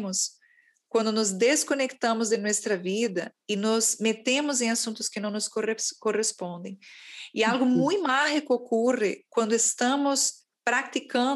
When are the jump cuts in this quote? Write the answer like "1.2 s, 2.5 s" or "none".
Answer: none

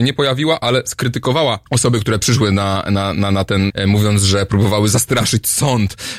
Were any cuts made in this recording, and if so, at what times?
1.7 s, 3.7 s

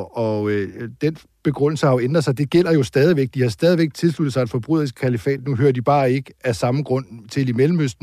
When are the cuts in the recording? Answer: none

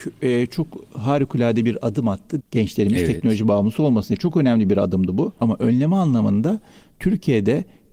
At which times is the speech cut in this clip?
2.4 s, 5.4 s

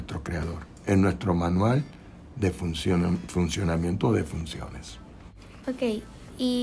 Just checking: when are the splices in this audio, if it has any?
5.6 s

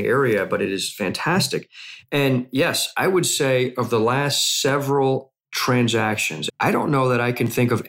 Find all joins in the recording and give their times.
6.5 s

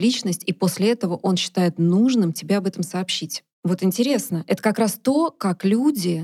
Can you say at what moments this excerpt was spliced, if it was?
3.6 s

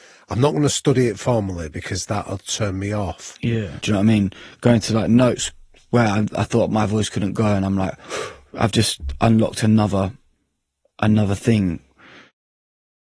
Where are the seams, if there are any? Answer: 3.8 s

